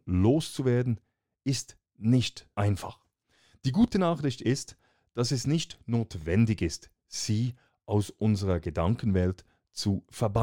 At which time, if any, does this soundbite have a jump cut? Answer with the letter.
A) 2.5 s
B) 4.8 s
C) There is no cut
A